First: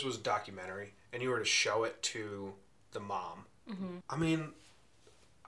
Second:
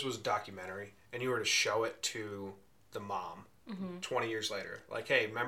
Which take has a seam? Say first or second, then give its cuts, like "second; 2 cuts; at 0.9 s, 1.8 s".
first; 1 cut; at 4.0 s